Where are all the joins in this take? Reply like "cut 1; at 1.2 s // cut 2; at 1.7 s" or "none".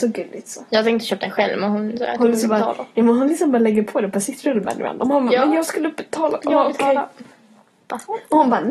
cut 1; at 6.5 s